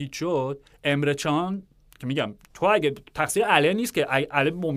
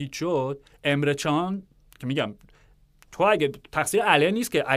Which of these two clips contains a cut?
first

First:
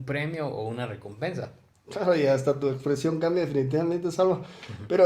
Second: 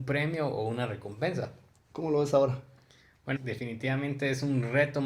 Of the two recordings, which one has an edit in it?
second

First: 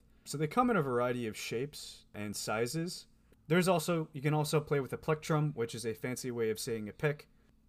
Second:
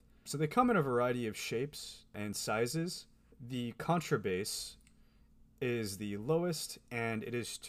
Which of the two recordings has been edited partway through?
first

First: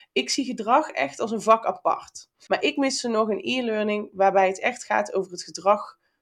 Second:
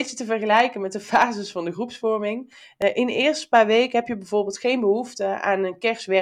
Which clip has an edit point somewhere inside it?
first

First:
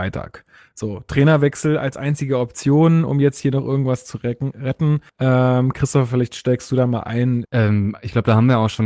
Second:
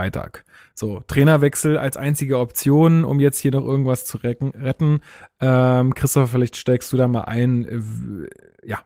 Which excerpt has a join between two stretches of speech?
first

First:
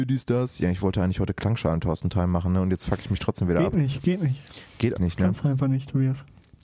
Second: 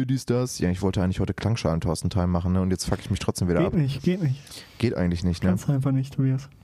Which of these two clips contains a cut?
first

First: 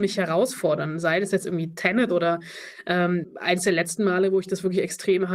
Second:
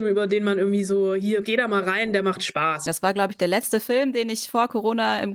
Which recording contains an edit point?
second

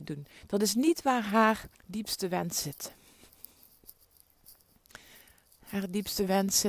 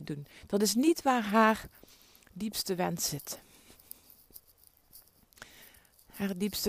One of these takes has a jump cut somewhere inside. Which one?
first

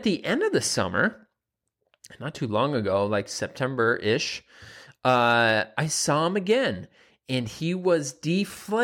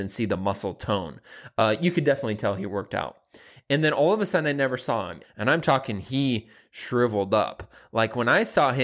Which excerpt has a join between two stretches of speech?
second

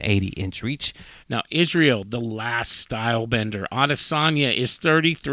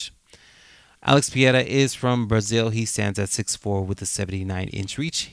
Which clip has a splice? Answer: first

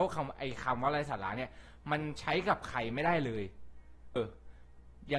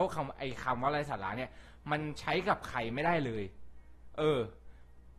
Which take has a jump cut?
first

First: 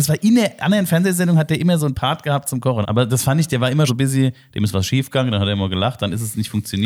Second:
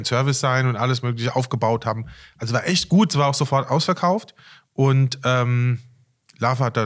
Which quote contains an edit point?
first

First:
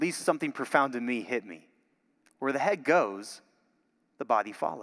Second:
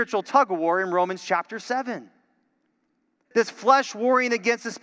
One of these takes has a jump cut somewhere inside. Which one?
second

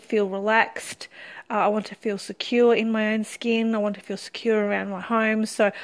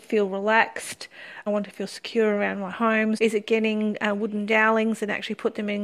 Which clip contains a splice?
second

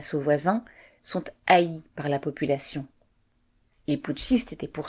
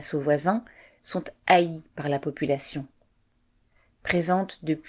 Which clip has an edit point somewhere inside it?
first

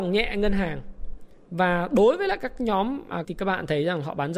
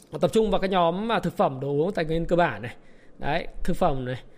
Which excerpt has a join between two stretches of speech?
first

